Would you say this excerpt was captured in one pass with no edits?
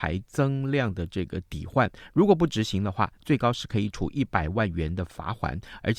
yes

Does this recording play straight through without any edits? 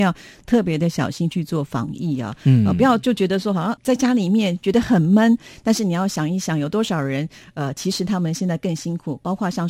yes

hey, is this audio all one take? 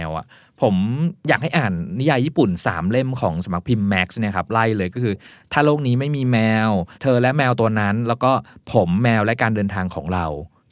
no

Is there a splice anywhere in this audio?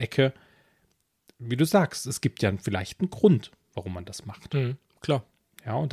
no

